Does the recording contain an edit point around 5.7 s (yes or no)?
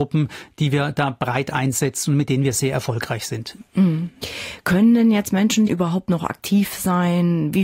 yes